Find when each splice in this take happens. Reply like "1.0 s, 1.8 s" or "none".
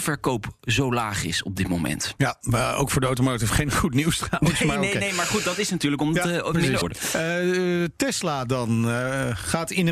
6.8 s